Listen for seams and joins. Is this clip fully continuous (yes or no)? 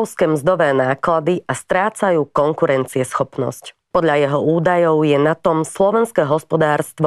no